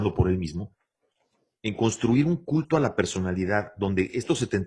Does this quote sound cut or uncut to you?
uncut